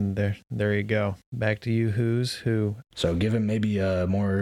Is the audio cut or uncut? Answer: cut